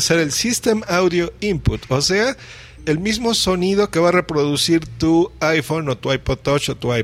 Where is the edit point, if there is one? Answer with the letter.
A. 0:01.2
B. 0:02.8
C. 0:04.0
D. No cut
B